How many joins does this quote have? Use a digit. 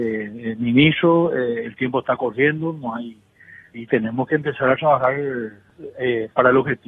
1